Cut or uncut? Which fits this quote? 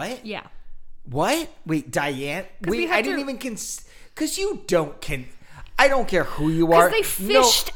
uncut